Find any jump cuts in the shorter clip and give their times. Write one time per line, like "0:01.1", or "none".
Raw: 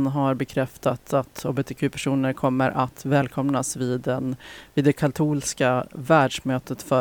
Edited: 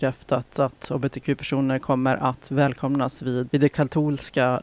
0:03.5